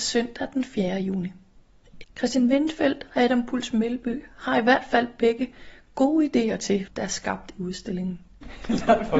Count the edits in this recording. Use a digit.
2